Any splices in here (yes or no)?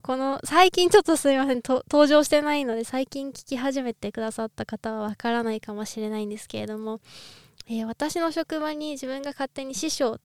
no